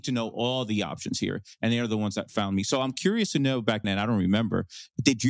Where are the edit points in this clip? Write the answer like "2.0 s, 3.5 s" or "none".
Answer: 3.8 s